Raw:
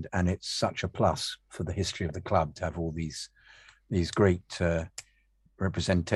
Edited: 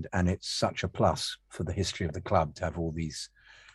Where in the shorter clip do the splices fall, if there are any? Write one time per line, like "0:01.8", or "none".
none